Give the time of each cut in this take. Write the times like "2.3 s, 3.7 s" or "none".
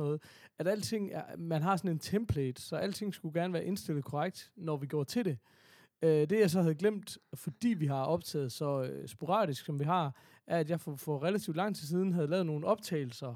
none